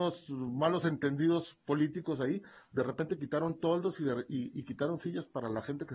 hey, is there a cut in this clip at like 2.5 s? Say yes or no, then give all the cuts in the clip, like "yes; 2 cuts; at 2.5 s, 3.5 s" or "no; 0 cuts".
no; 0 cuts